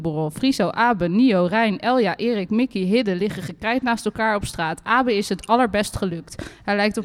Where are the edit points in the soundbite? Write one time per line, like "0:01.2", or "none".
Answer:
none